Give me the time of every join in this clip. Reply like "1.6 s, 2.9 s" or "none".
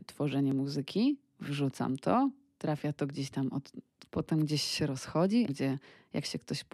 4.1 s, 5.5 s